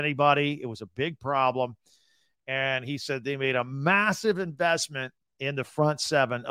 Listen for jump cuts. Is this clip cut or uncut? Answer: uncut